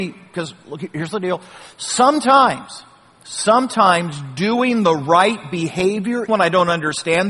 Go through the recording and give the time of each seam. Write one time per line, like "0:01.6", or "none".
0:06.3